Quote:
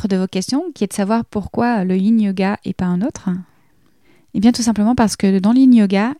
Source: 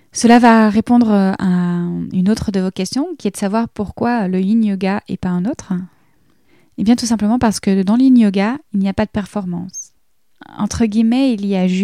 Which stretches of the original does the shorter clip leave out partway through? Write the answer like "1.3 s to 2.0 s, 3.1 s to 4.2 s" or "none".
none